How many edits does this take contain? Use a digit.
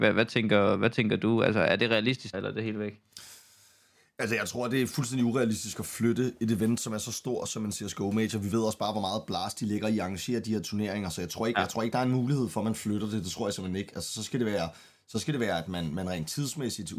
1